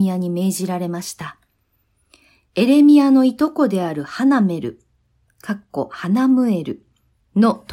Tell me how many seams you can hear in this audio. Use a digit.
0